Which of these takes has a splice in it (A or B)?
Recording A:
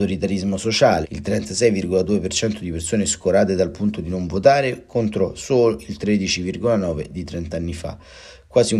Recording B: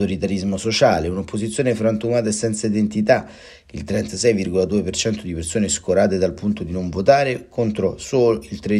A